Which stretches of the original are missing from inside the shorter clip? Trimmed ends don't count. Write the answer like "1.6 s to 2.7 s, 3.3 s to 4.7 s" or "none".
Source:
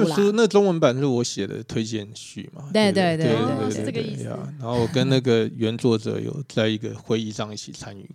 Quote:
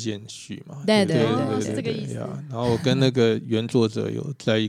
2.9 s to 3.2 s